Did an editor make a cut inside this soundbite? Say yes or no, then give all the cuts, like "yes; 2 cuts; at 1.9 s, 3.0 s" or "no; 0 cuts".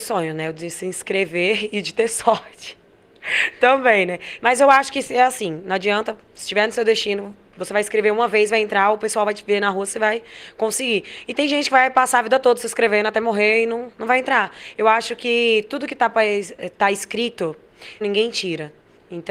yes; 3 cuts; at 4.4 s, 13.9 s, 18.0 s